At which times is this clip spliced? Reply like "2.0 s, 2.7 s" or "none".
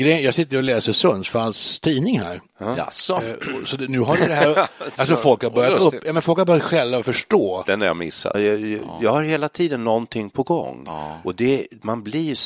8.3 s

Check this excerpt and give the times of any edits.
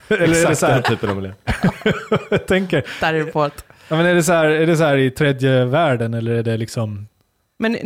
none

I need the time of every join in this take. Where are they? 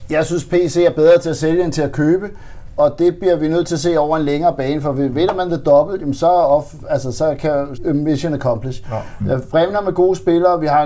7.8 s, 9.2 s

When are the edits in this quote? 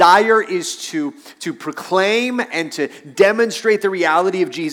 none

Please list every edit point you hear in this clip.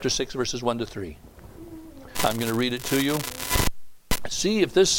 2.1 s

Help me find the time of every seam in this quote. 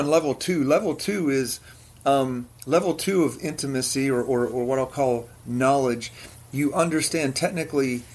none

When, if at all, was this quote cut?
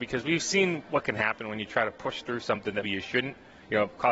2.8 s

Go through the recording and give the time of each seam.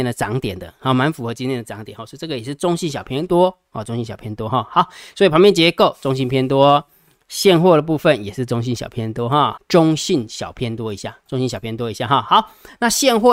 9.6 s, 11.3 s

